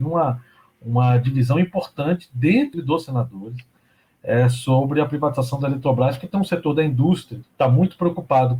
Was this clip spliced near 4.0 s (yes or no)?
no